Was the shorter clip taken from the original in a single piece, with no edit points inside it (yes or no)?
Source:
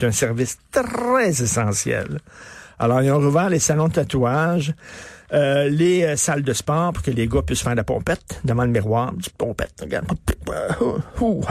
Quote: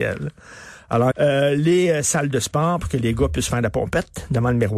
no